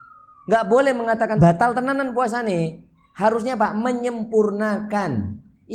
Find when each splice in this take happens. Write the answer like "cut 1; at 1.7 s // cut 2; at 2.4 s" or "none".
cut 1; at 1.4 s